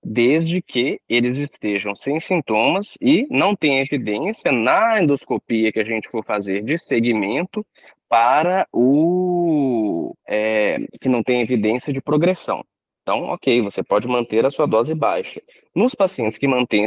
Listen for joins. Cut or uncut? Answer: cut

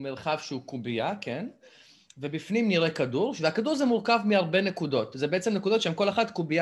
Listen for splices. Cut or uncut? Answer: uncut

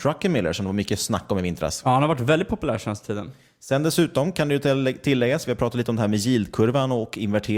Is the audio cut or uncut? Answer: uncut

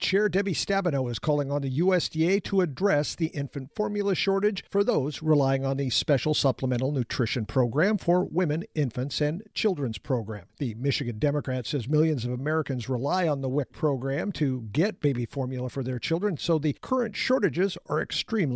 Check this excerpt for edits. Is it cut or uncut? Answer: uncut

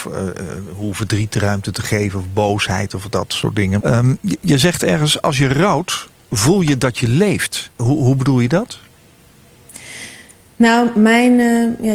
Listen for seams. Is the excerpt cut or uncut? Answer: cut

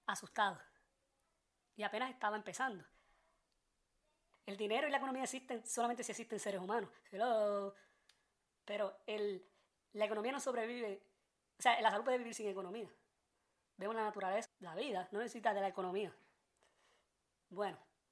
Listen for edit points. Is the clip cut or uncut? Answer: cut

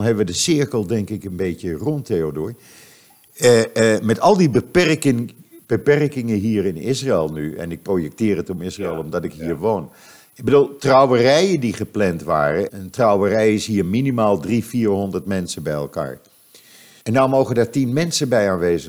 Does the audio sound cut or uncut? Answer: cut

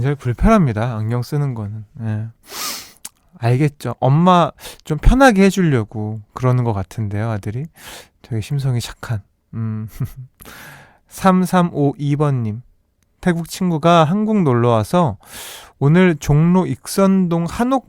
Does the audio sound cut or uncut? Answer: uncut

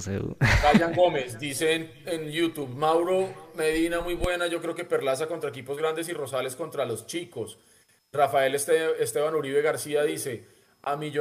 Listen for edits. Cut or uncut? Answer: uncut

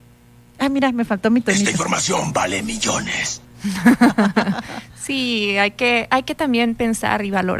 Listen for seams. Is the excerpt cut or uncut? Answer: uncut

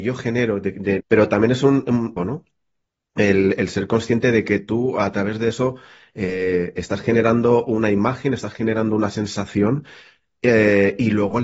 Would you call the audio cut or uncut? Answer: cut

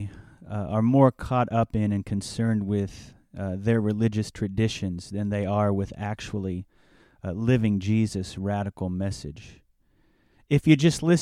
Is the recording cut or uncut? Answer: uncut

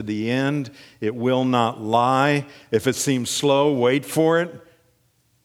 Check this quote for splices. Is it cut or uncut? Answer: uncut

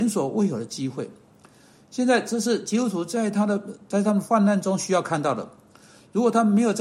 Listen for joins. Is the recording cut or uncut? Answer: uncut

